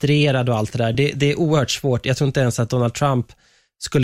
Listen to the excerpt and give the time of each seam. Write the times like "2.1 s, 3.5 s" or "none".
none